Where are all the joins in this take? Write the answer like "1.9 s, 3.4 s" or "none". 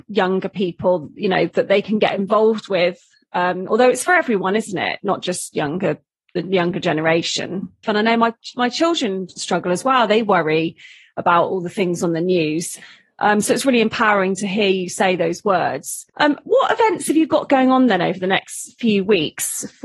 7.8 s, 16.1 s